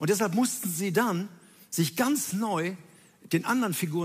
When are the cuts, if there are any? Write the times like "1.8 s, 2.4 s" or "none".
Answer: none